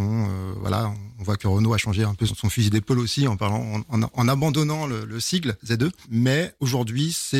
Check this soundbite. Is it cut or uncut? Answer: uncut